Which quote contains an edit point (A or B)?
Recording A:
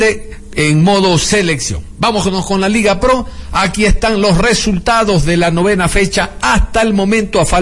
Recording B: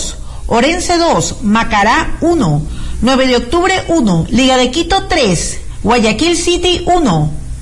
B